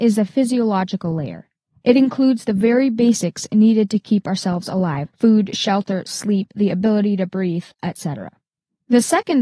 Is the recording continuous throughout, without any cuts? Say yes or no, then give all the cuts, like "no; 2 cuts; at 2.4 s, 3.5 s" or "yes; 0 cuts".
no; 2 cuts; at 5.1 s, 7.7 s